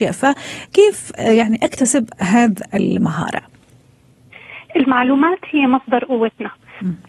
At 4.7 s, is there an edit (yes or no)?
no